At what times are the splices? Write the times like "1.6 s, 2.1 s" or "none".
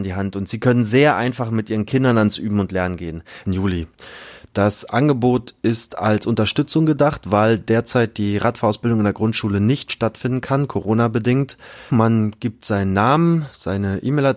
3.5 s, 11.9 s